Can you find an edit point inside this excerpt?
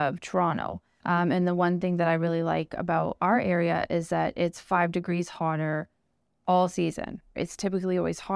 yes; 2 cuts; at 1.0 s, 7.4 s

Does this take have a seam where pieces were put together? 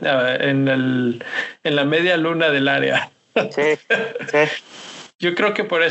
no; 0 cuts

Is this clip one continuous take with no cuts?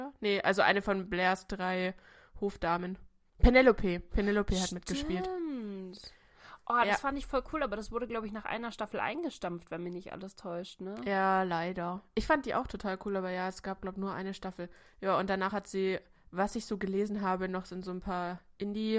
yes; 0 cuts

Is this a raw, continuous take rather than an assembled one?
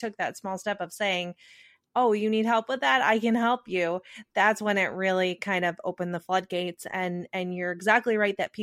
yes; 0 cuts

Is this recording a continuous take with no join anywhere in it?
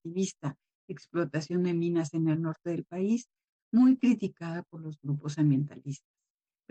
yes; 0 cuts

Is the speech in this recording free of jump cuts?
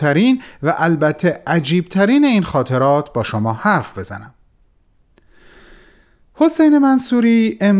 yes; 0 cuts

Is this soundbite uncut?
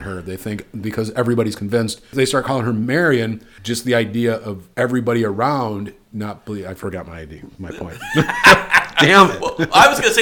yes; 0 cuts

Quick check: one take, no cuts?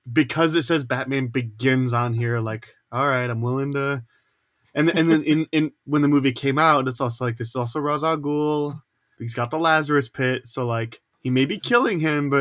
yes; 0 cuts

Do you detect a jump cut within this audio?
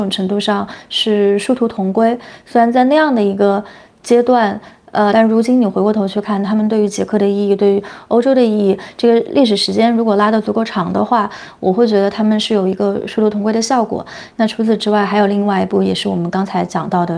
yes; 2 cuts; at 5.1 s, 14.3 s

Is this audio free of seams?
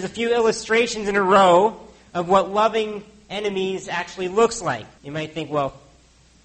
no; 1 cut; at 5.0 s

